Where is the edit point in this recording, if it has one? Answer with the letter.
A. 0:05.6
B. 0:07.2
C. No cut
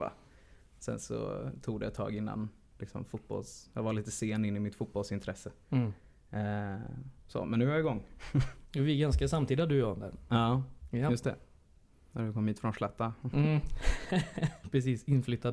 C